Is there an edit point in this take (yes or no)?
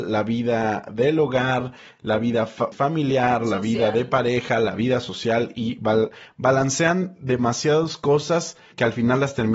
yes